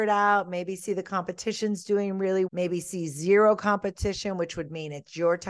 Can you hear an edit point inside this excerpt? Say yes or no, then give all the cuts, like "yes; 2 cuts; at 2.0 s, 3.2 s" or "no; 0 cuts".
yes; 1 cut; at 2.5 s